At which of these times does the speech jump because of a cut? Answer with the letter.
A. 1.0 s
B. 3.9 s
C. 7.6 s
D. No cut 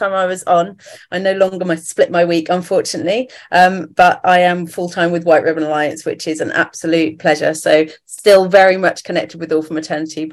D